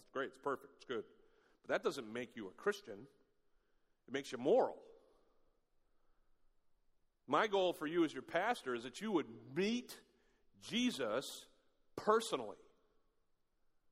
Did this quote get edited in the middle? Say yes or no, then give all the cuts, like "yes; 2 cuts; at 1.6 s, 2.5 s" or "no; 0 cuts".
no; 0 cuts